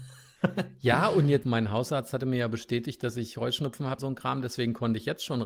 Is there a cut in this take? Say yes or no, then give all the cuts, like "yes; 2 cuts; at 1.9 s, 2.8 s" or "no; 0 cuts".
yes; 2 cuts; at 1.4 s, 4.0 s